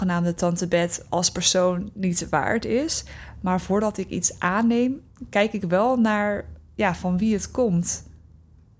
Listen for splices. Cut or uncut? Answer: uncut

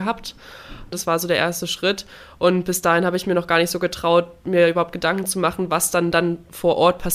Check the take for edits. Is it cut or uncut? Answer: cut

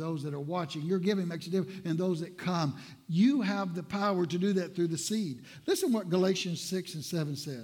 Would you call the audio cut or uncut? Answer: uncut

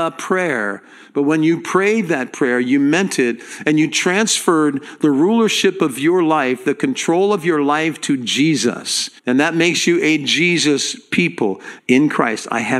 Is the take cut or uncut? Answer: cut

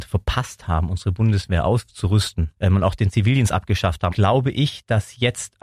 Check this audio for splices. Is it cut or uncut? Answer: cut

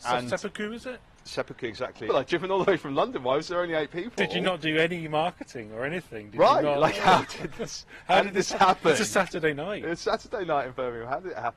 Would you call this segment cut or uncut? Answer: cut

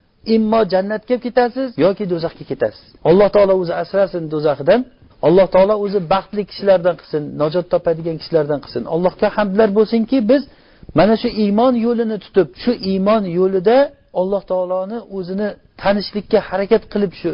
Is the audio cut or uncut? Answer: cut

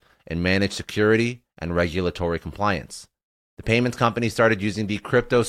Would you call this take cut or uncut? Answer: uncut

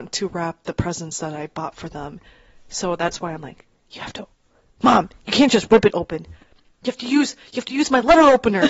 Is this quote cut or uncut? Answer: uncut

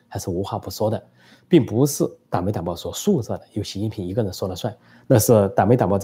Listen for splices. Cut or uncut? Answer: cut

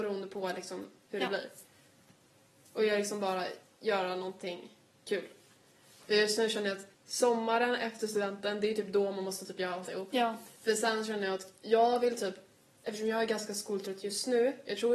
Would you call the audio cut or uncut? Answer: cut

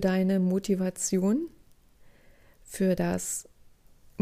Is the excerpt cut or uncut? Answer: uncut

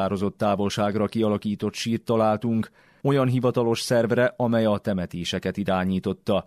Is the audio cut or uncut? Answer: cut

